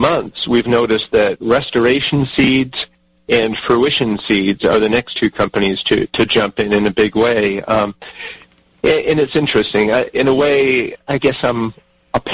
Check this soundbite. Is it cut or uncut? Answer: uncut